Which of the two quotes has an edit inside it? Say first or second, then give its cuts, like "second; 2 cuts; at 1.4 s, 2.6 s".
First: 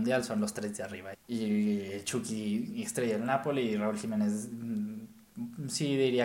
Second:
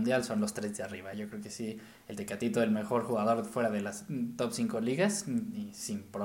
first; 1 cut; at 1.1 s